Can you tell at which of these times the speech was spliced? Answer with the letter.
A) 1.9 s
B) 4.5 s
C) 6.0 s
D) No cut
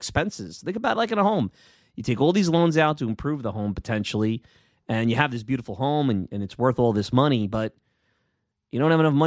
D